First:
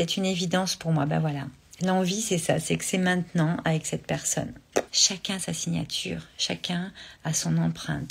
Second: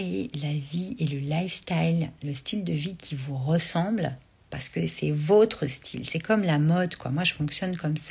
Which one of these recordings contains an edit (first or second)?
first